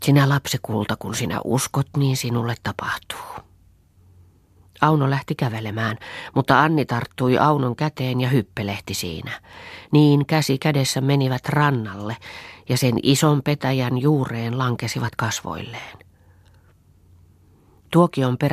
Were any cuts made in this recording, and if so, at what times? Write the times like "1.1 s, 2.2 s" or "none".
none